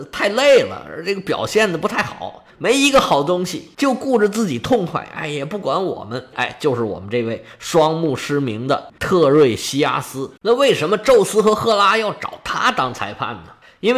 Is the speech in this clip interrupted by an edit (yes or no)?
yes